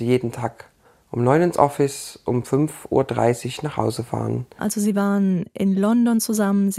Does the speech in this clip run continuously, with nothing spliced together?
no; 1 cut; at 4.6 s

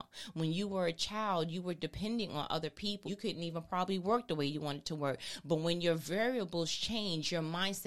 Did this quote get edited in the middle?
yes; 1 cut; at 3.0 s

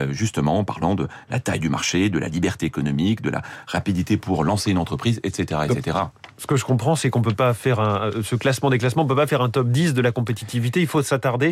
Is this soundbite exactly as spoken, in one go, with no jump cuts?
yes; 0 cuts

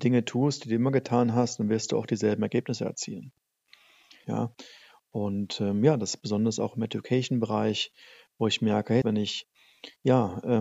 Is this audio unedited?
no; 2 cuts; at 4.2 s, 9.0 s

